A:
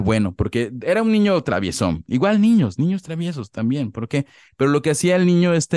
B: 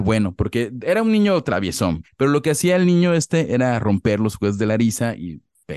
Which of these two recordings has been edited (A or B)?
B